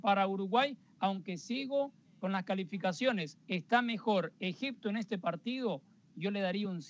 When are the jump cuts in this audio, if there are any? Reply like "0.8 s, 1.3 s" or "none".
3.4 s